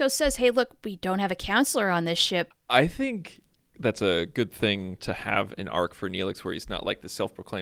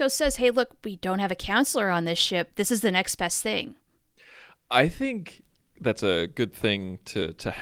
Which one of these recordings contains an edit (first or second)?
first